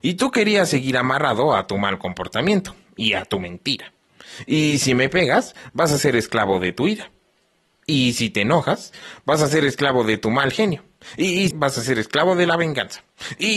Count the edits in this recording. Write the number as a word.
one